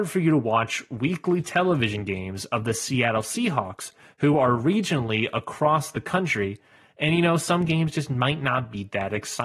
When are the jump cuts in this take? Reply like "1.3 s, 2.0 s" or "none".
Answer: none